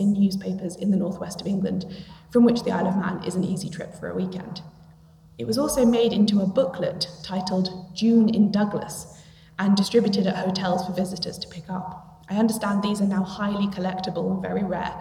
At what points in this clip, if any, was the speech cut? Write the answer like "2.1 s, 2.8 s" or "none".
none